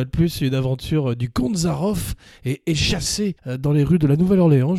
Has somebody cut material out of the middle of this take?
no; 0 cuts

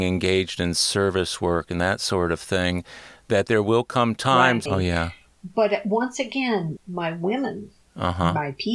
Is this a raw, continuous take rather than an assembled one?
no; 2 cuts; at 4.7 s, 6.8 s

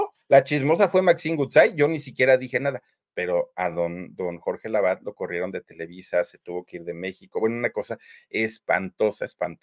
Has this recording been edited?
no; 0 cuts

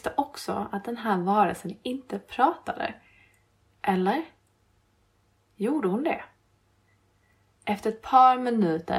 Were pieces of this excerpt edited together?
no; 0 cuts

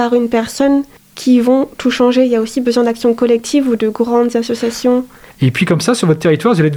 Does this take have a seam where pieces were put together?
yes; 1 cut; at 5.3 s

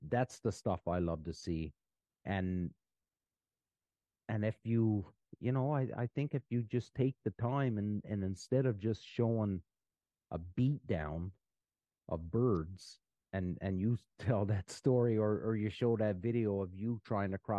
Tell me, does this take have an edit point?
no; 0 cuts

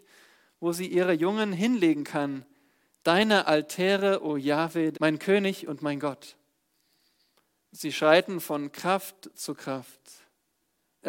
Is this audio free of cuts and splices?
no; 2 cuts; at 4.9 s, 7.6 s

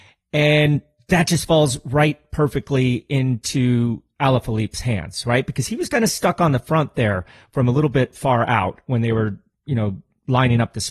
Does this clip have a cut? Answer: no; 0 cuts

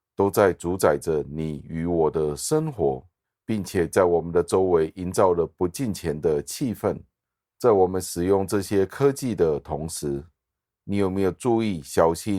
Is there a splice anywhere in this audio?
no; 0 cuts

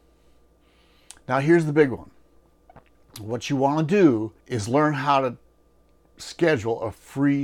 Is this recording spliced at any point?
yes; 1 cut; at 4.4 s

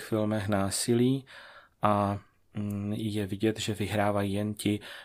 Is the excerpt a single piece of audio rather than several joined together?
yes; 0 cuts

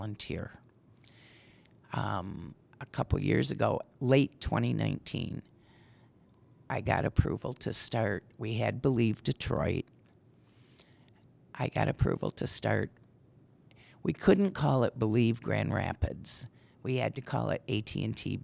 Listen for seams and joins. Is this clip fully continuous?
yes; 0 cuts

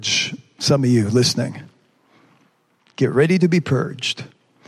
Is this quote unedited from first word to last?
yes; 0 cuts

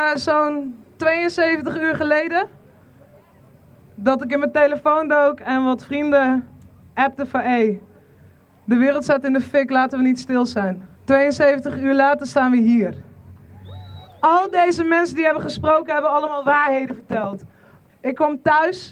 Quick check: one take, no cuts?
no; 3 cuts; at 10.9 s, 14.0 s, 17.9 s

